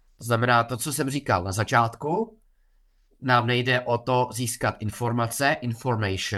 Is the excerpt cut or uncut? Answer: uncut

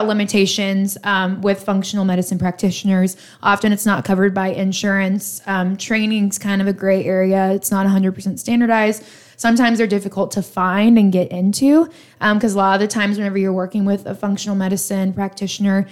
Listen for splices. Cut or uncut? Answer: uncut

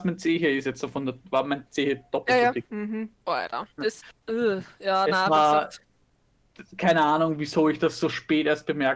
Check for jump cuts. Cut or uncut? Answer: cut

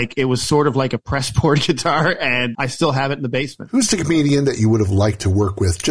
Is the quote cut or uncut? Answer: cut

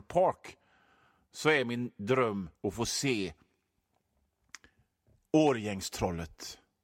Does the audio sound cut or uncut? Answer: cut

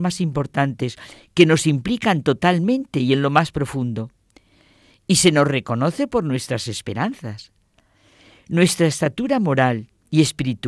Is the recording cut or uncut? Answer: cut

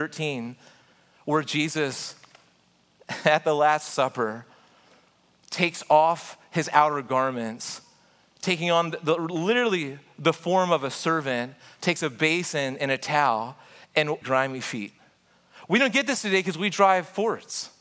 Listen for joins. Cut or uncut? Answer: cut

